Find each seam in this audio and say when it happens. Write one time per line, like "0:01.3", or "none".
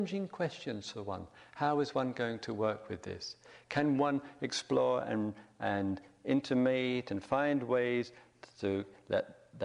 none